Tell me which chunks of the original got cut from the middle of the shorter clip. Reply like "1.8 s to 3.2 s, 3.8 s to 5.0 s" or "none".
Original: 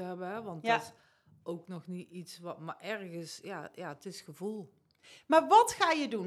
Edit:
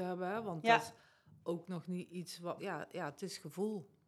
2.6 s to 3.4 s

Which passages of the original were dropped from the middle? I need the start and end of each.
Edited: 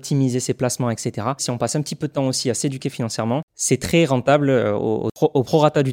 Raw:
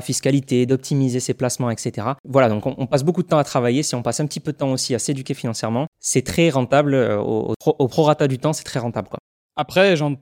2.2 s to 3.8 s

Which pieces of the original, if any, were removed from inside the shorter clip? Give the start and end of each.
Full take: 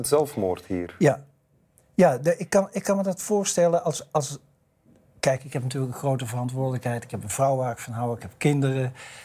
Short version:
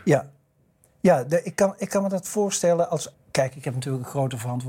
4.1 s to 5.0 s

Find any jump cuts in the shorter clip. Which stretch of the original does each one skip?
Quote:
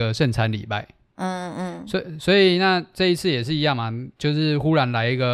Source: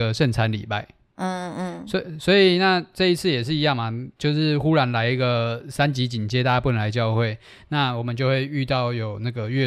none

